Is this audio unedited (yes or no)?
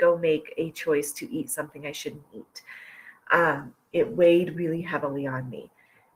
no